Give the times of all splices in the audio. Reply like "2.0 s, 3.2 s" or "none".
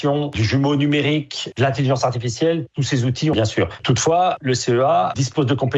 1.5 s, 3.3 s